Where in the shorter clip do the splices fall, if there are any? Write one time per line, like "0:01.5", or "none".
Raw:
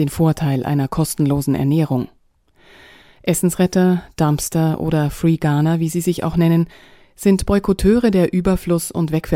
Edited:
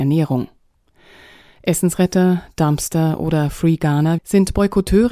0:04.2